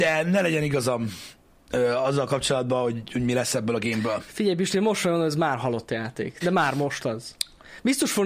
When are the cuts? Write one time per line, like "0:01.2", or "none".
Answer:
0:06.4